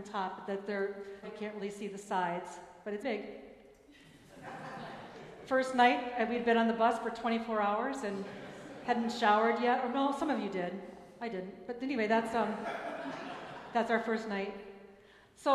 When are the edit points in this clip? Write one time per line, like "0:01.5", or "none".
0:01.2
0:03.0